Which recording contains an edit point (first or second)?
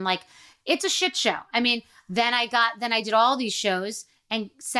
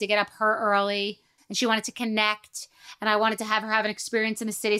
second